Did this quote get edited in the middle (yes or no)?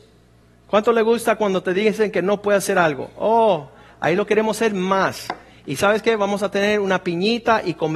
no